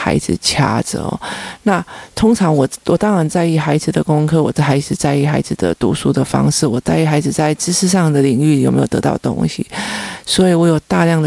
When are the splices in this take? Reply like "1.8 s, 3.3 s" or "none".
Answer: none